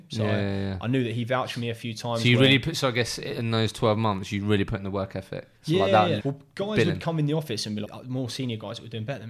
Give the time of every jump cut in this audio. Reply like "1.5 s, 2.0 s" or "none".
6.2 s, 7.8 s